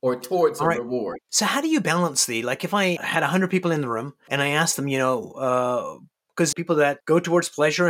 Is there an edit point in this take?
yes; 3 cuts; at 1.2 s, 3.0 s, 6.5 s

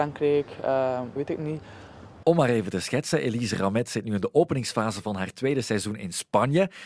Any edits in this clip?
yes; 2 cuts; at 1.2 s, 2.2 s

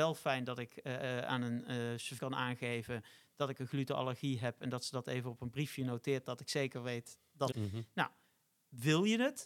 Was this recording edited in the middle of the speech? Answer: yes; 2 cuts; at 2.2 s, 7.5 s

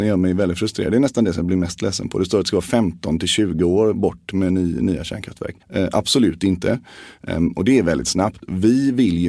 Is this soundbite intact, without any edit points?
no; 2 cuts; at 5.6 s, 7.2 s

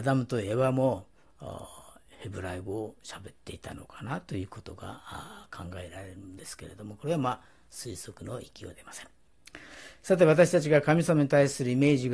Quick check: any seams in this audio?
no; 0 cuts

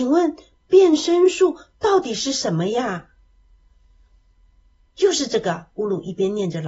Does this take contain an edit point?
no; 0 cuts

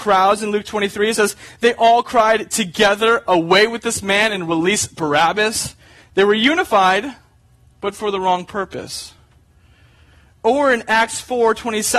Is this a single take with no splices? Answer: yes; 0 cuts

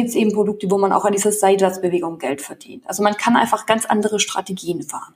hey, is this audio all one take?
yes; 0 cuts

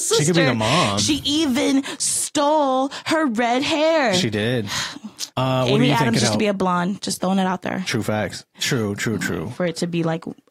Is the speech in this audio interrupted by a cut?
yes; 2 cuts; at 5.3 s, 8.5 s

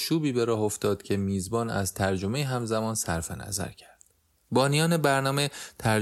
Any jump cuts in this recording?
yes; 1 cut; at 4.3 s

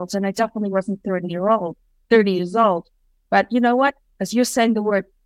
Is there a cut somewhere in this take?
no; 0 cuts

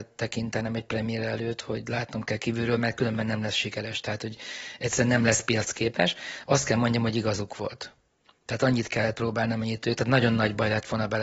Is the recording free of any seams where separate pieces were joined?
yes; 0 cuts

